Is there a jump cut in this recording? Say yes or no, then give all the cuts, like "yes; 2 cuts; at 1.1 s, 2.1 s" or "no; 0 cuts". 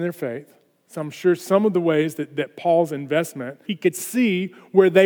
yes; 1 cut; at 3.7 s